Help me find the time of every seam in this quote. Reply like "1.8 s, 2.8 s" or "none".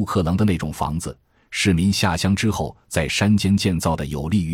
1.4 s